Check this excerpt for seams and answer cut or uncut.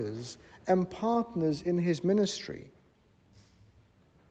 uncut